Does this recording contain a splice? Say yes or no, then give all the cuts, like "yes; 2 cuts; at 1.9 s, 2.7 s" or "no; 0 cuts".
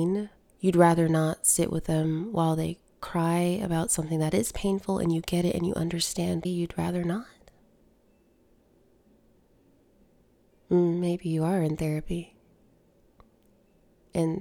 yes; 1 cut; at 6.4 s